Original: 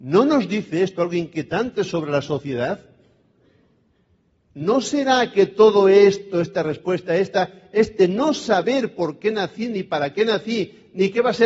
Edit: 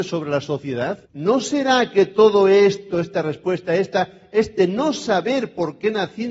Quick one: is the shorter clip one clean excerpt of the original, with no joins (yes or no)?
no